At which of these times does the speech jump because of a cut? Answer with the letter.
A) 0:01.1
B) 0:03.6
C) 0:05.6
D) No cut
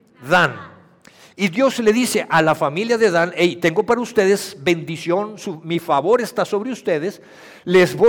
D